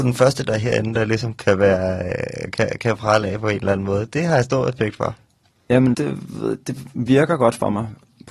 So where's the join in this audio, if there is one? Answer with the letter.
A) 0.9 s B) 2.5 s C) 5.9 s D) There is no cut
C